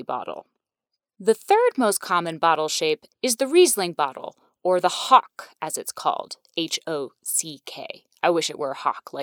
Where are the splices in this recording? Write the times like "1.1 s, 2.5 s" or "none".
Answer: 3.1 s